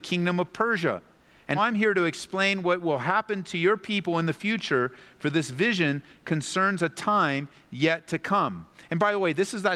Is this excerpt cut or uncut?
cut